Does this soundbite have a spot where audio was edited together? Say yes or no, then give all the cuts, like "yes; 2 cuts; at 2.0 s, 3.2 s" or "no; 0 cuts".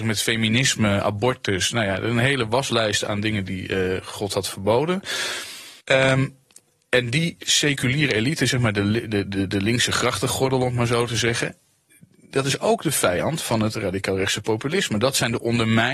yes; 1 cut; at 5.8 s